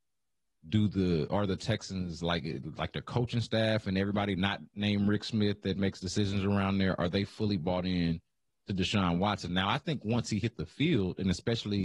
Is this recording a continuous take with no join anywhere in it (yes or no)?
yes